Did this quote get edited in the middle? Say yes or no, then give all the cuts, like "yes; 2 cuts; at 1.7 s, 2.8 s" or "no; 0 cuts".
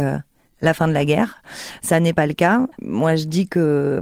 yes; 1 cut; at 2.7 s